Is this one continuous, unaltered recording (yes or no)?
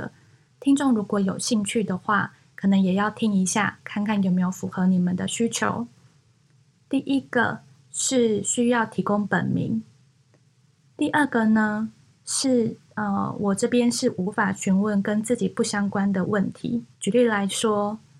no